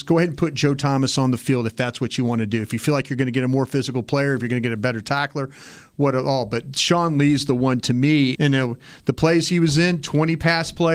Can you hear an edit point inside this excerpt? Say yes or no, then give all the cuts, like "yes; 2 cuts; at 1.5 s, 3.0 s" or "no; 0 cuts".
yes; 1 cut; at 8.3 s